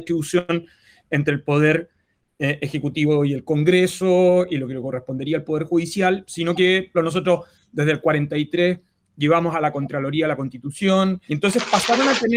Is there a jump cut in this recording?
yes; 2 cuts; at 6.9 s, 11.3 s

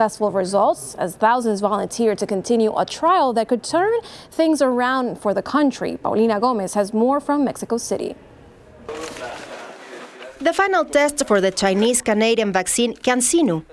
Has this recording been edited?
no; 0 cuts

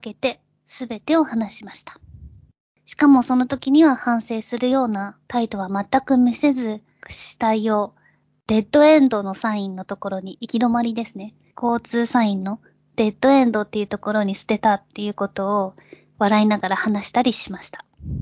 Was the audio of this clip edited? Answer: no; 0 cuts

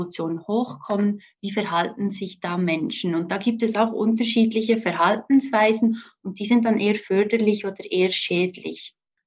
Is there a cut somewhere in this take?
no; 0 cuts

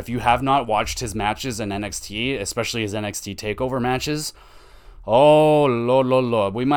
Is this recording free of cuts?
yes; 0 cuts

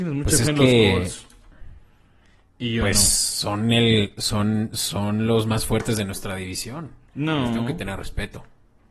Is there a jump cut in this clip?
no; 0 cuts

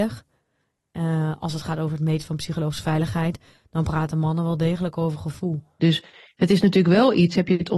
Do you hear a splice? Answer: yes; 1 cut; at 5.8 s

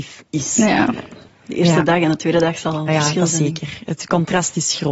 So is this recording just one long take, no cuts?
no; 2 cuts; at 1.3 s, 2.9 s

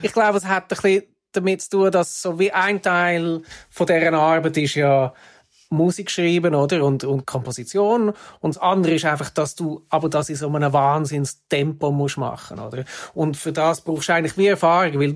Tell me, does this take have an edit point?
no; 0 cuts

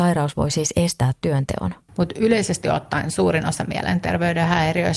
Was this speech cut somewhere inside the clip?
yes; 1 cut; at 1.9 s

